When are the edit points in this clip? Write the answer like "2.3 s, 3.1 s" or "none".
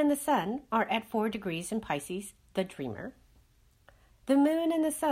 4.1 s